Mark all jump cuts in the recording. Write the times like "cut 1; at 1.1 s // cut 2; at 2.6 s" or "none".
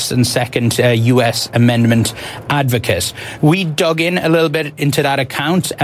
none